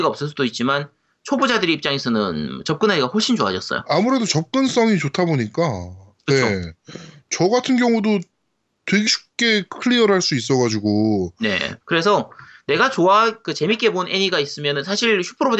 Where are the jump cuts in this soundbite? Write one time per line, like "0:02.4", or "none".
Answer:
0:09.1
0:11.8